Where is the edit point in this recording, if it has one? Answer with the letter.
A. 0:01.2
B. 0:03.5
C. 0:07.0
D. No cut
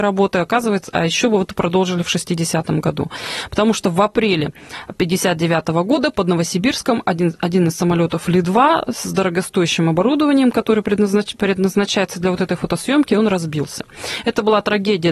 D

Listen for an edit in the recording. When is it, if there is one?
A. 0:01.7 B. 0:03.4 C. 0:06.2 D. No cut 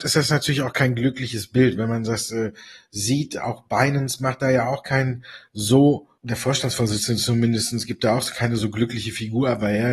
C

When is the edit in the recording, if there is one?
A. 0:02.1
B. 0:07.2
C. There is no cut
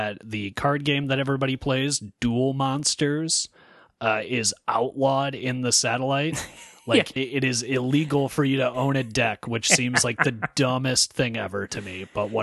B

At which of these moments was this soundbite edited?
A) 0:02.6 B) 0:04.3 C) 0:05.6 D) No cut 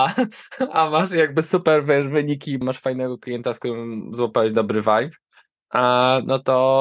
A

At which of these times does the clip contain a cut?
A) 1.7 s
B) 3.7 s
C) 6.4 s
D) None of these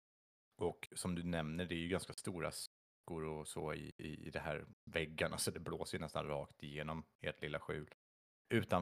D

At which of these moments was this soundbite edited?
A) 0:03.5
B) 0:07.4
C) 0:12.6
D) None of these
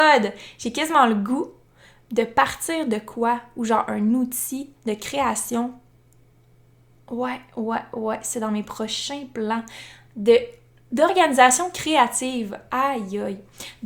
D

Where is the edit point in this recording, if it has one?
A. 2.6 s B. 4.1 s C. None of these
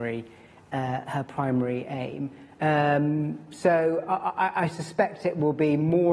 A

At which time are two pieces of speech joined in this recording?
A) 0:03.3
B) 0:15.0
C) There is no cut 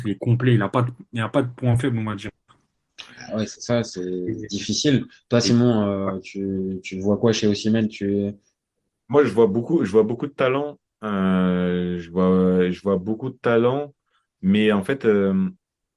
C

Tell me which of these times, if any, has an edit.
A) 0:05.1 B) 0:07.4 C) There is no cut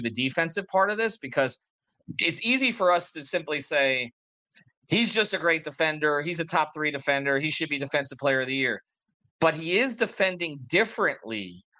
C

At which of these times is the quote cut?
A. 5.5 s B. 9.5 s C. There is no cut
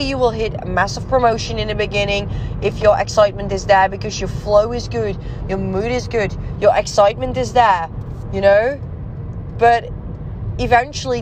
C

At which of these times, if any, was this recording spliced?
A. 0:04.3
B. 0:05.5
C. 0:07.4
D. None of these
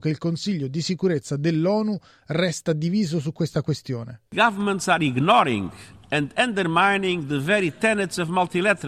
A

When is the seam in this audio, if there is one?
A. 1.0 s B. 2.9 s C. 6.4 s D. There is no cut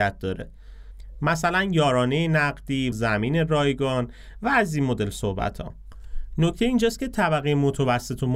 B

